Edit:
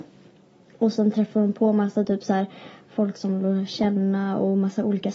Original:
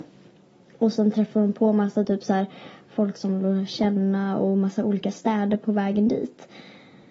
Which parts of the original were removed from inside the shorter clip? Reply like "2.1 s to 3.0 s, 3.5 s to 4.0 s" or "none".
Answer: none